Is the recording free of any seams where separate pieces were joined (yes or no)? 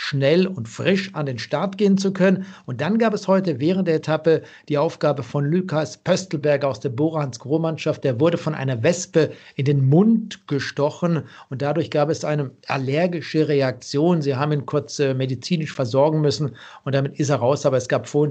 yes